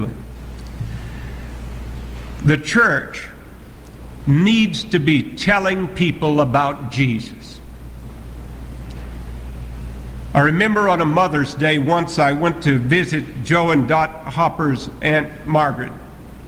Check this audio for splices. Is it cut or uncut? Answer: uncut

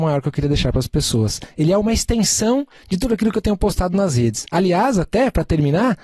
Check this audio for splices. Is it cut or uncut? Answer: uncut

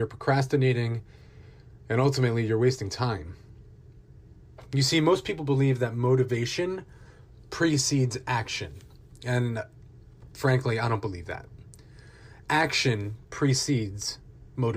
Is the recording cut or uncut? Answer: uncut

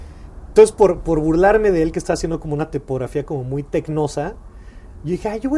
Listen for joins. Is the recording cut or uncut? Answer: uncut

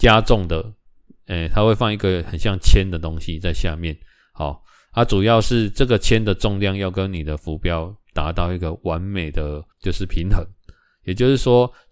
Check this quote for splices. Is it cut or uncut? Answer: cut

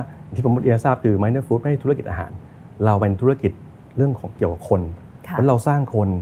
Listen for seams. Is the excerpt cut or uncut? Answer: uncut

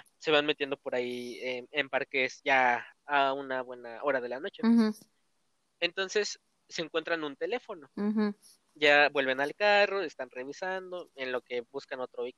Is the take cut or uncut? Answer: uncut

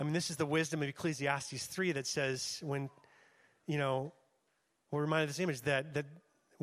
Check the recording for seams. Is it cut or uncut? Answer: uncut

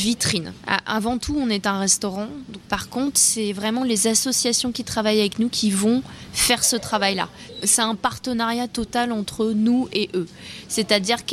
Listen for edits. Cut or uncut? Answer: uncut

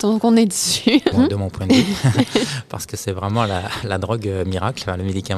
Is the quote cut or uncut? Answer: cut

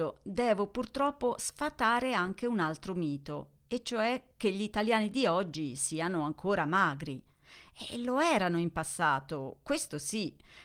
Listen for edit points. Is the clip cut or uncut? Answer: uncut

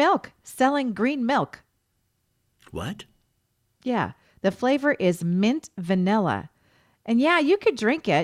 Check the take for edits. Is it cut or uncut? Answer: uncut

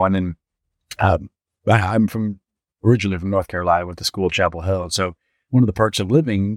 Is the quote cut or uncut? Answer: uncut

